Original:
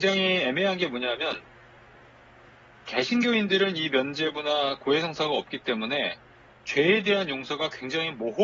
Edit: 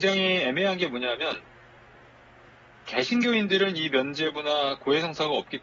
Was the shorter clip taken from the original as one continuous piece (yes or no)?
yes